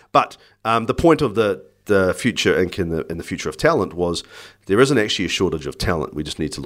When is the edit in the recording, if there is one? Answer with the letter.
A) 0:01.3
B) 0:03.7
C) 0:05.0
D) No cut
D